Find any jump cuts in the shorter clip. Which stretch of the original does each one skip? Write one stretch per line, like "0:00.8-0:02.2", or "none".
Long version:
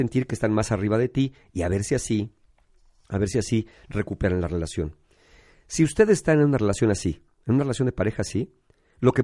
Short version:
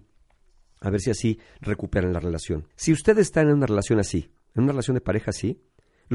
0:05.0-0:05.6